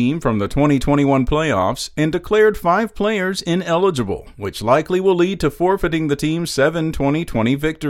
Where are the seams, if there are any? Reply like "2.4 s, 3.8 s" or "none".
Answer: none

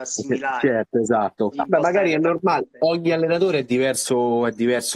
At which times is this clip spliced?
1.5 s

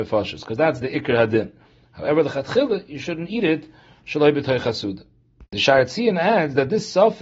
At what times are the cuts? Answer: none

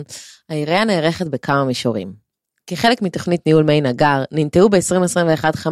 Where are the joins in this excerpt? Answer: none

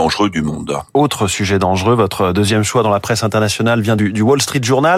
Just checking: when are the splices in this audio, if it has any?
none

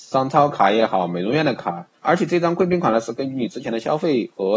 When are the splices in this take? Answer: 2.0 s

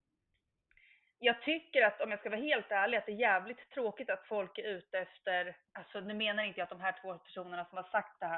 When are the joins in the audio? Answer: none

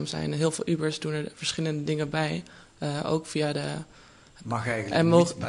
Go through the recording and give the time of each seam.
4.4 s

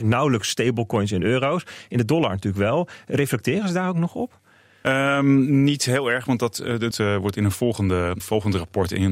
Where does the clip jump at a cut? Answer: 6.9 s, 8.2 s

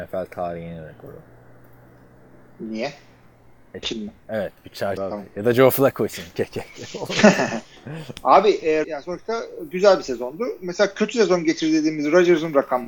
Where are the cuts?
3.8 s, 5.0 s, 8.8 s

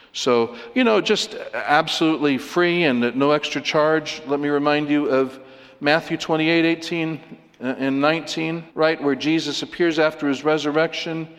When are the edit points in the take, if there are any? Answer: 8.7 s

